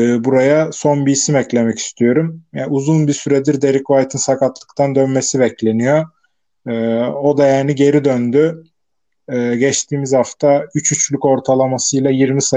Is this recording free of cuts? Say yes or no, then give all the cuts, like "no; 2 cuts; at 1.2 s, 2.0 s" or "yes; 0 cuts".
yes; 0 cuts